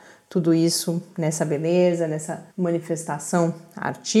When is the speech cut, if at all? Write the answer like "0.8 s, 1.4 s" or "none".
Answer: 2.5 s